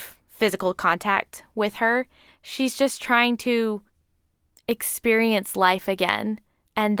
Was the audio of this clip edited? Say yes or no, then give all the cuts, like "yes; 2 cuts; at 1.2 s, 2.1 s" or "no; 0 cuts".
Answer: yes; 1 cut; at 2.3 s